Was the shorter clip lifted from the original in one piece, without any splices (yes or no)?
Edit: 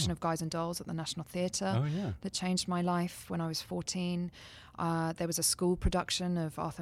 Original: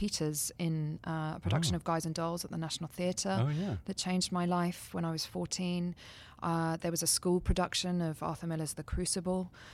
yes